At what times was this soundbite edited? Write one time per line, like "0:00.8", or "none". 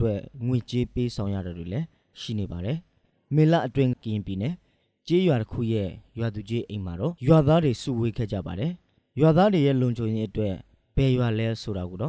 0:03.9
0:07.2